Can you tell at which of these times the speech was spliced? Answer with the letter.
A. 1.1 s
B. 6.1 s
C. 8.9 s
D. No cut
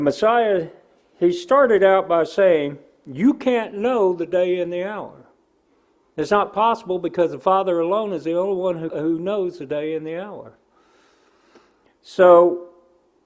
C